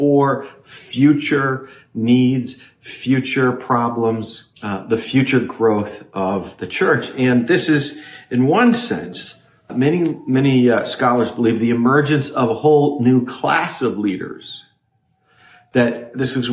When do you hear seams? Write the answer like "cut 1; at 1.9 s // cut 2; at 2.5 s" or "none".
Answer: cut 1; at 4.5 s // cut 2; at 9.7 s